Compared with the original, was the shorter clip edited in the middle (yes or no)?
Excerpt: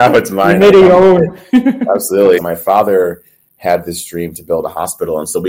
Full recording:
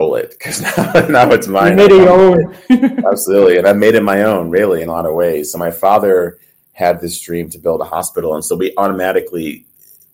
yes